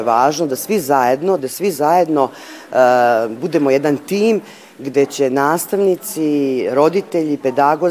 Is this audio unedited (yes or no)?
no